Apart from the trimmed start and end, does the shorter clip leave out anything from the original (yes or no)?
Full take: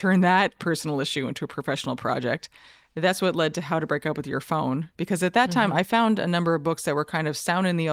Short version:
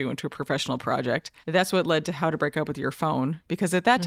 yes